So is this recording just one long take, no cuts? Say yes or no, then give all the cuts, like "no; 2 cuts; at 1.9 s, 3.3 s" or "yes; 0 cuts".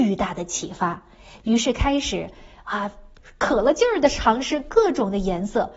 yes; 0 cuts